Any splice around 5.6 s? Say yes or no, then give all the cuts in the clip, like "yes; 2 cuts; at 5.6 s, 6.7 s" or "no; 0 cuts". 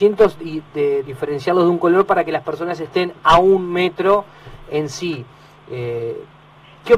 no; 1 cut; at 1.0 s